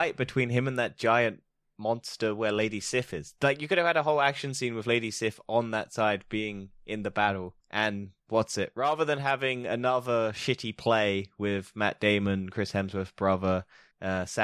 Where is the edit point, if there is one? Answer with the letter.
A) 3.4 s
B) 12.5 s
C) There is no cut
C